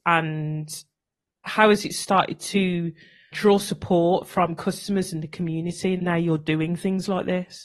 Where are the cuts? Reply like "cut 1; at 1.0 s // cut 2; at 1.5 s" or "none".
cut 1; at 3.3 s // cut 2; at 6.0 s